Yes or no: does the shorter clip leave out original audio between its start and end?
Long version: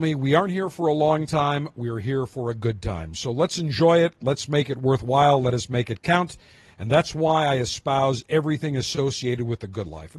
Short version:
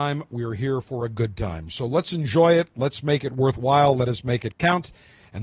no